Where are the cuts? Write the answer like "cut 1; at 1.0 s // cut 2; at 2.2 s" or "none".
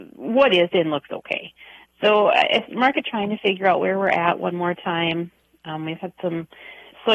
none